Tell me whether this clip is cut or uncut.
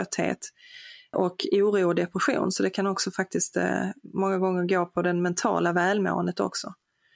cut